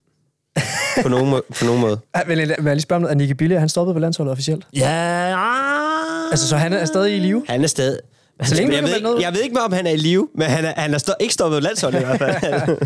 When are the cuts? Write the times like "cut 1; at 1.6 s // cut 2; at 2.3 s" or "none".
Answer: cut 1; at 2.6 s